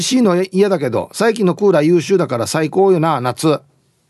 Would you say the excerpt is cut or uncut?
uncut